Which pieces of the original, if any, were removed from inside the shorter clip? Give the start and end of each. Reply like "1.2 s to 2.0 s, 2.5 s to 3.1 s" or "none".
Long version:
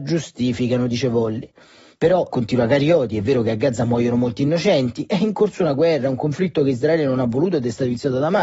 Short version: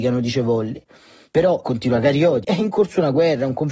3.1 s to 5.1 s